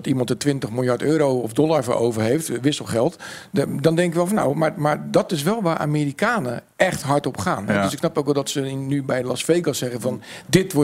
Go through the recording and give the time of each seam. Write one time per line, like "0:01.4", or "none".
none